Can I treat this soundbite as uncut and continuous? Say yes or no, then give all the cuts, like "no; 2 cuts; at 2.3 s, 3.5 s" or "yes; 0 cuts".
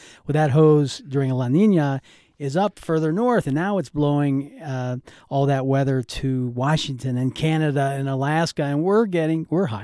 yes; 0 cuts